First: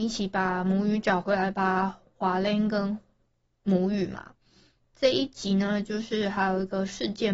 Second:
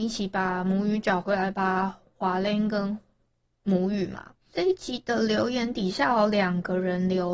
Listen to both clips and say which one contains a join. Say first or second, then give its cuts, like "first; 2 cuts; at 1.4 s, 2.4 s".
second; 1 cut; at 4.5 s